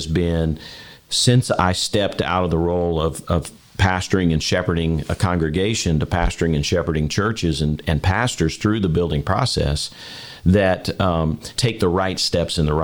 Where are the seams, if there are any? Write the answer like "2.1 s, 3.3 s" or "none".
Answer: 11.5 s